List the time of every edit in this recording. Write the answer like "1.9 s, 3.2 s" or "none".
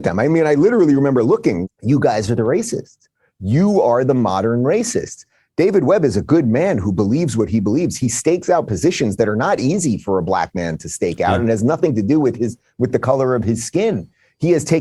1.6 s